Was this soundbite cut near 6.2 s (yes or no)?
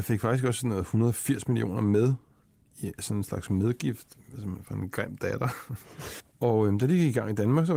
yes